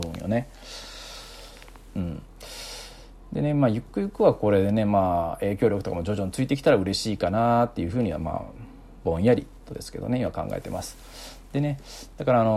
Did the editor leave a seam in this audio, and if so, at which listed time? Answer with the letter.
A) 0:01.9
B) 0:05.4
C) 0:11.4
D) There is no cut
A